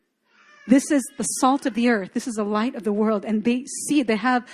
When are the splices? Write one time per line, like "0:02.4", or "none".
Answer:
none